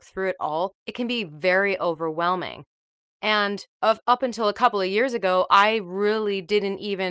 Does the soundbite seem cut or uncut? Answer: cut